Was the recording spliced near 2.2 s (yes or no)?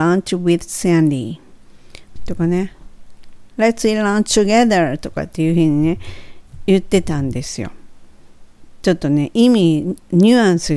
yes